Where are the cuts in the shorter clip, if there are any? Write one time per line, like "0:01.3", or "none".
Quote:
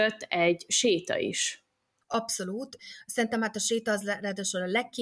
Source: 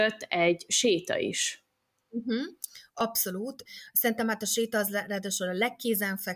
0:02.0